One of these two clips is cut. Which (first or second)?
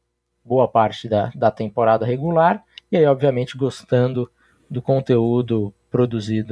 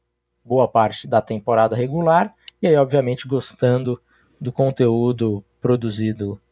second